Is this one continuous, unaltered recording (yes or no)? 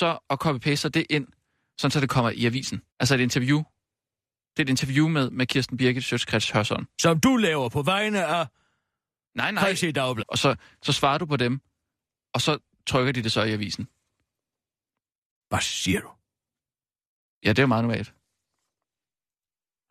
no